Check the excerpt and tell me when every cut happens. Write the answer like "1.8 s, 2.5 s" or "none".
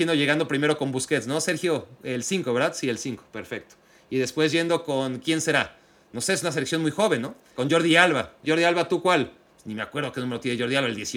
none